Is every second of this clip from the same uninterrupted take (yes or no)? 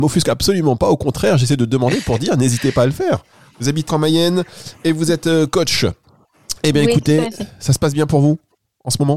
no